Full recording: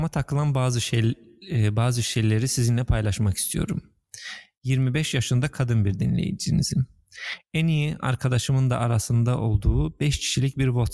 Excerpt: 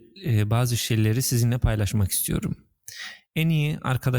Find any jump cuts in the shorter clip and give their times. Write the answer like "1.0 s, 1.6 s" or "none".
3.3 s